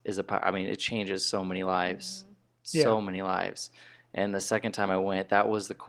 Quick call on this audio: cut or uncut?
uncut